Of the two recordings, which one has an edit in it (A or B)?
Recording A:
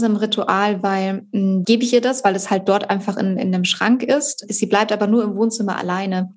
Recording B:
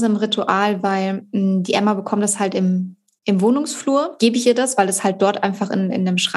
A